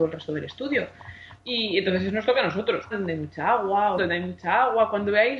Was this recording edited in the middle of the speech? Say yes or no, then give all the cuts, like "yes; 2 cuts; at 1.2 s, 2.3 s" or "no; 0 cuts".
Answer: yes; 3 cuts; at 1.4 s, 2.9 s, 4.0 s